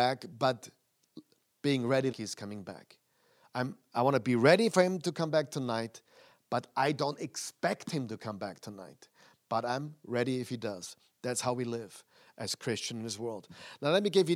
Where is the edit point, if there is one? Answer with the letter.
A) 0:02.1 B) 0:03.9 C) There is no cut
A